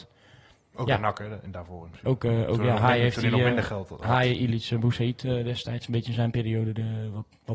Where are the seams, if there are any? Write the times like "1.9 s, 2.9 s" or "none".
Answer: none